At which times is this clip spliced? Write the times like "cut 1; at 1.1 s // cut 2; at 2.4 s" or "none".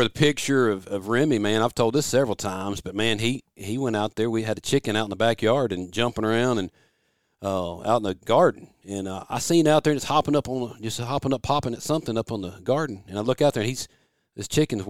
none